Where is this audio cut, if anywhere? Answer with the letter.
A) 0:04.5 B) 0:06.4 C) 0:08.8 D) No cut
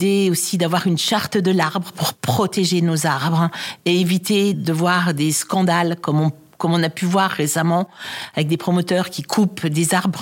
A